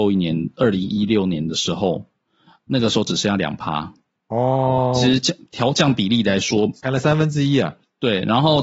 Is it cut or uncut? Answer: uncut